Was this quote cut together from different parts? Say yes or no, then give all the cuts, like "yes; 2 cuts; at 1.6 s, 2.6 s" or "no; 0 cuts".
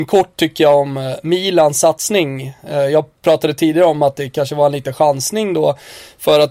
no; 0 cuts